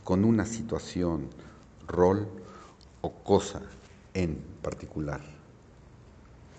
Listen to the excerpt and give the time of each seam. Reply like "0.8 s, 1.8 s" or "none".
none